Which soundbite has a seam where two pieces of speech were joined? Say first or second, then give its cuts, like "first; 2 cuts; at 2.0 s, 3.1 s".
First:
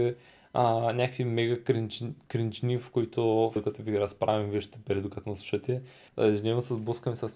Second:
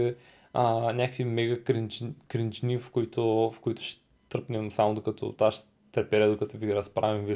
first; 2 cuts; at 3.6 s, 6.1 s